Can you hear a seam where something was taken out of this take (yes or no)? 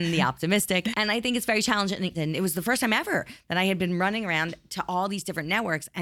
yes